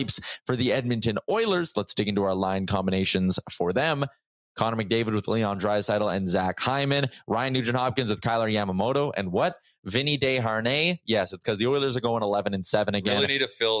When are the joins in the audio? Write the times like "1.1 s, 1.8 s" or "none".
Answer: none